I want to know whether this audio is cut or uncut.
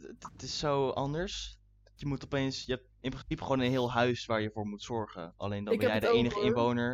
cut